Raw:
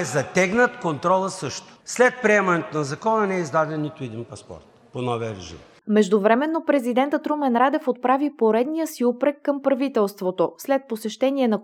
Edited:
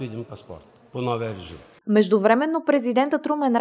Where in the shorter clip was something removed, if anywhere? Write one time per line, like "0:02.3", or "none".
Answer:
none